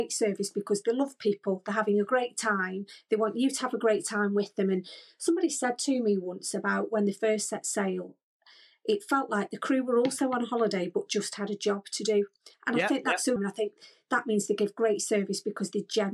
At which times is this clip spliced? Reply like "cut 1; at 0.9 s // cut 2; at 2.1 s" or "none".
cut 1; at 13.4 s